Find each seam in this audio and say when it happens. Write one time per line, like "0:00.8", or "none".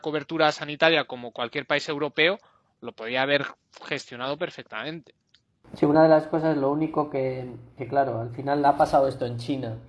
none